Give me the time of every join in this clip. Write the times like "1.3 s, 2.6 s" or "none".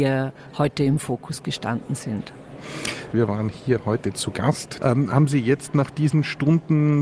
3.1 s, 4.8 s